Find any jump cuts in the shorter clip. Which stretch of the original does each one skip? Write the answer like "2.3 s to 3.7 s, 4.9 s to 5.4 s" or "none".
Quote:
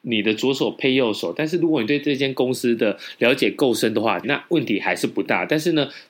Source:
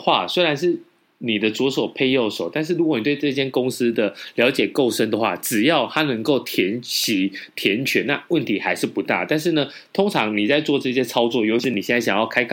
5.4 s to 8.0 s